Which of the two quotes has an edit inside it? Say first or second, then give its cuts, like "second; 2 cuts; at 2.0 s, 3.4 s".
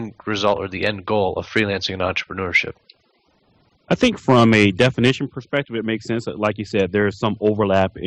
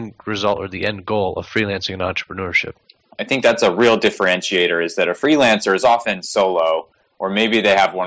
second; 1 cut; at 3.1 s